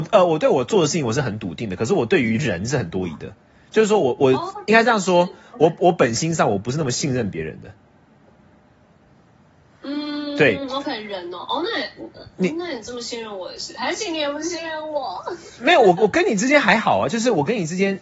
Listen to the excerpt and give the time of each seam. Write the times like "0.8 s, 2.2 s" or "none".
none

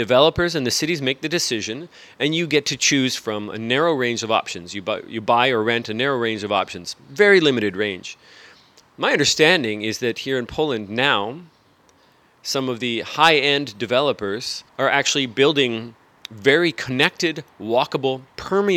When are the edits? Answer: 14.7 s

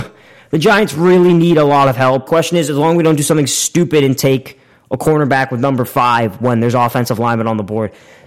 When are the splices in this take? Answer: 2.3 s

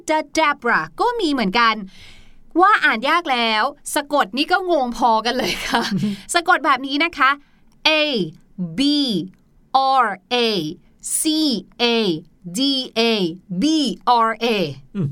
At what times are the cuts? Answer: none

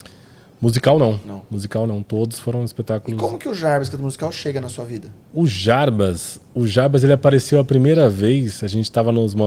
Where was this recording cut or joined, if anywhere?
5.2 s

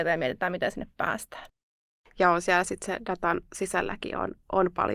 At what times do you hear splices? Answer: 2.0 s

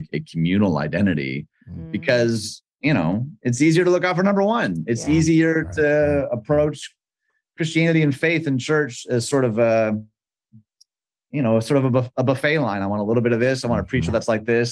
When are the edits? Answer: none

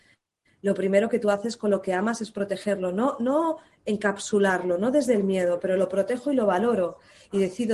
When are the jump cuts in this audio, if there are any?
none

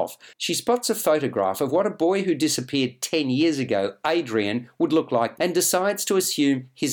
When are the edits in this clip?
5.4 s

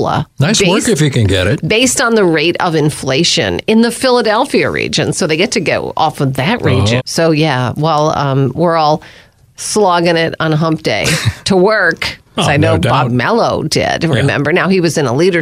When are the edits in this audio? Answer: 7.0 s, 12.4 s

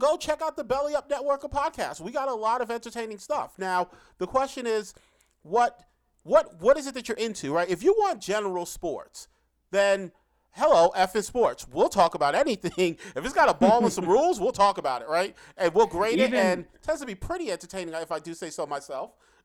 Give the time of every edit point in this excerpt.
none

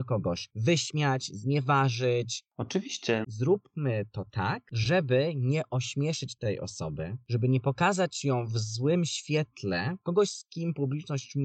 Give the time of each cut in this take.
3.2 s, 10.0 s

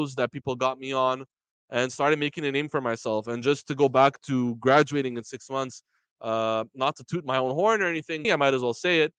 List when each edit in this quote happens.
8.2 s

